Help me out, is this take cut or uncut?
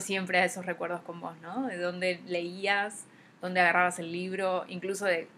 uncut